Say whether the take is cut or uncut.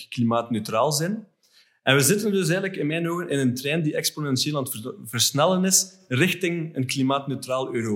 uncut